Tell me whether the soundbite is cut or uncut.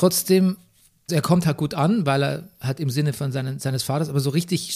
cut